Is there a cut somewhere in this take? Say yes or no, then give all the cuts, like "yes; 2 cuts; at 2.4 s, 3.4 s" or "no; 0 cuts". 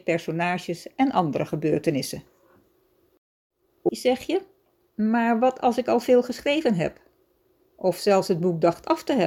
yes; 1 cut; at 3.9 s